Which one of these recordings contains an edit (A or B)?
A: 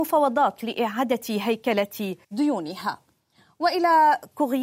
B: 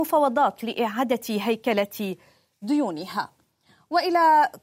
A